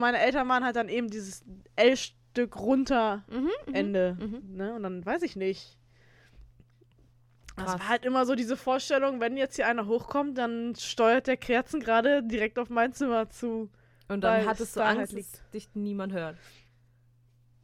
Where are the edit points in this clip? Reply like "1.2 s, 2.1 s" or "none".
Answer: none